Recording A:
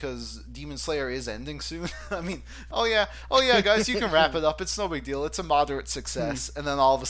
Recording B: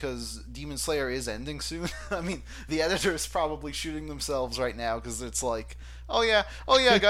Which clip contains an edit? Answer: A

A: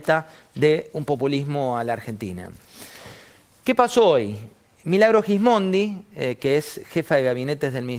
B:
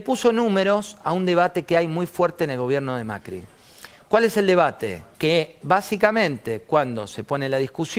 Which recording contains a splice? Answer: B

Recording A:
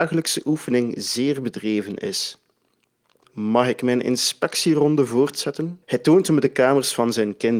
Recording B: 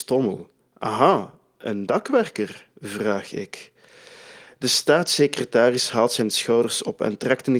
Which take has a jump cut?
A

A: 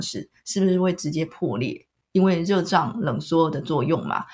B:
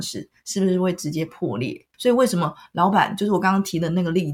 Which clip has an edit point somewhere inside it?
B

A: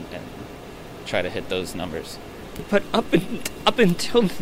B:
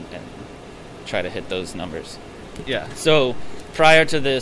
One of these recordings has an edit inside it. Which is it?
B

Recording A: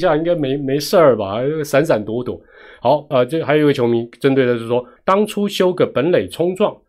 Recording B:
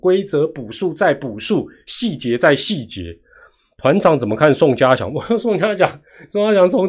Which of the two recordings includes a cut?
A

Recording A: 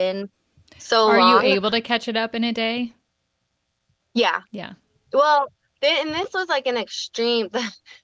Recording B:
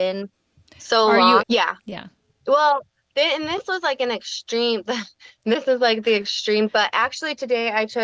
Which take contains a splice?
B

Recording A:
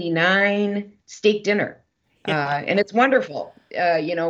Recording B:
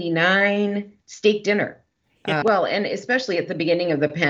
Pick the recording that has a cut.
B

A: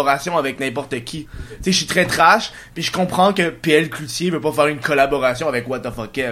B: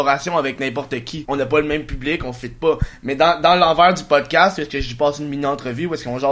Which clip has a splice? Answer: B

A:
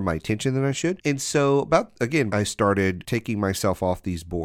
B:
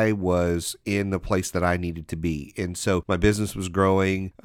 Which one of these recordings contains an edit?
A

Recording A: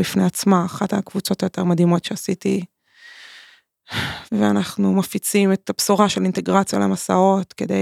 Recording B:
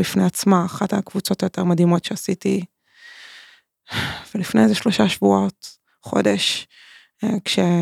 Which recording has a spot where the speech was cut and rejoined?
A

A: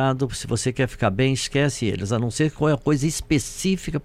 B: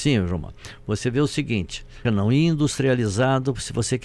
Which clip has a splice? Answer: B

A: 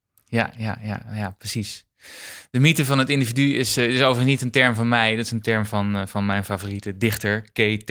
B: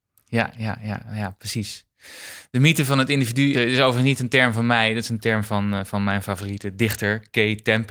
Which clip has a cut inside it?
B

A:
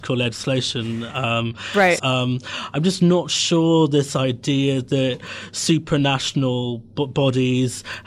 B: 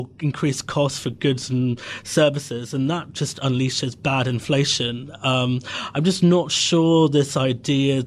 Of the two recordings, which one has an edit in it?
A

